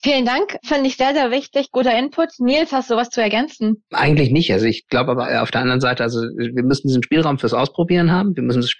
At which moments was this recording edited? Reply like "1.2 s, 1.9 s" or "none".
none

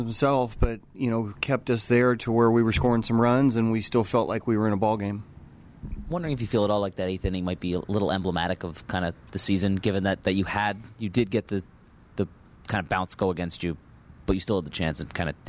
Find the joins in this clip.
none

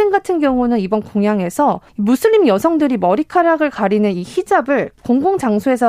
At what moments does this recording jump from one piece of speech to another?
1.9 s

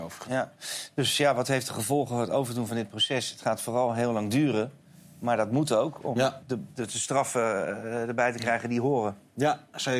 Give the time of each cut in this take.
none

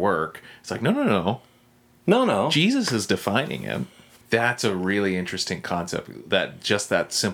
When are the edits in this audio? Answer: 4.2 s, 6.3 s

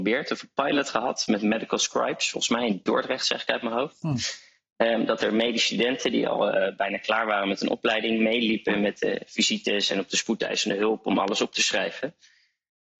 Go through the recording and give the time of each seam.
none

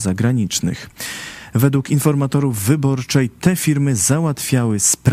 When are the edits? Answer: none

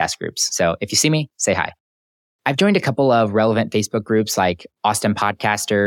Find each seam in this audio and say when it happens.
2.4 s

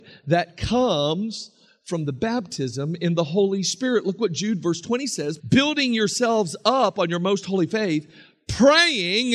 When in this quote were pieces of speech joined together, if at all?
5.4 s

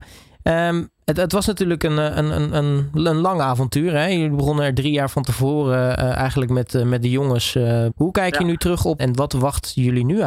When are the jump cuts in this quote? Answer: 7.9 s, 9.0 s

